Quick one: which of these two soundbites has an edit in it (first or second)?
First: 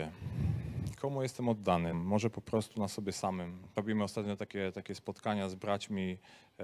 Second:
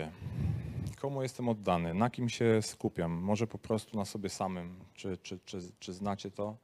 first